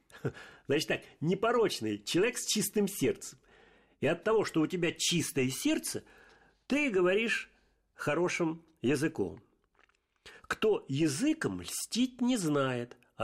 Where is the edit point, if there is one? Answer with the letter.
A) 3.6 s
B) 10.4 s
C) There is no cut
C